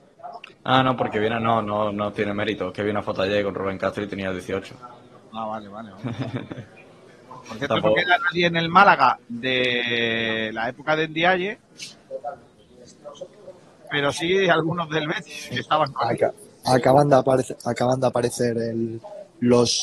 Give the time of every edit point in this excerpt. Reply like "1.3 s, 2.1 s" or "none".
none